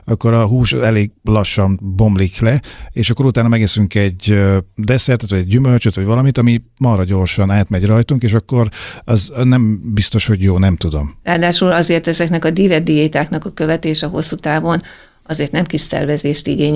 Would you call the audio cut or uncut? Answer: cut